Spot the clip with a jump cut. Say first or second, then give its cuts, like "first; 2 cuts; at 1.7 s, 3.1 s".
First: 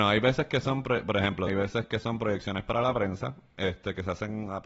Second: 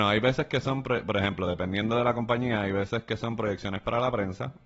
first; 1 cut; at 1.5 s